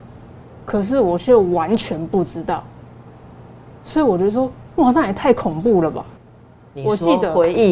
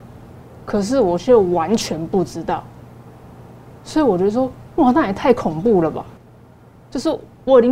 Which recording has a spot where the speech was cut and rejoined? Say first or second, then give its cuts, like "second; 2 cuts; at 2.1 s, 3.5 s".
first; 1 cut; at 6.7 s